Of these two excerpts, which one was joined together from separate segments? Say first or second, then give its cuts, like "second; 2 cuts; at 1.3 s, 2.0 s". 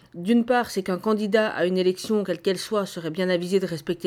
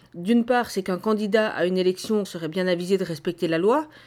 second; 1 cut; at 2.2 s